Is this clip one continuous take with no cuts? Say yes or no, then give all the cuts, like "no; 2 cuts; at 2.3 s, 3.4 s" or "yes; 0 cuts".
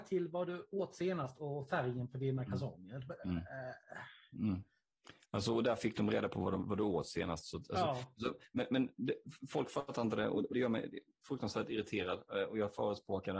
no; 1 cut; at 10.5 s